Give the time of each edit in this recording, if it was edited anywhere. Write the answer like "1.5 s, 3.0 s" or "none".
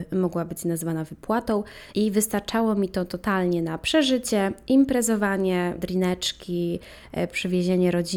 1.9 s, 5.8 s

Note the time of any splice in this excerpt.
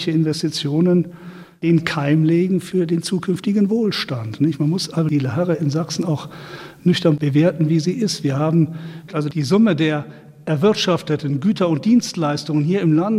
9.1 s

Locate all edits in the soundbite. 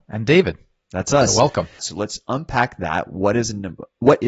1.8 s

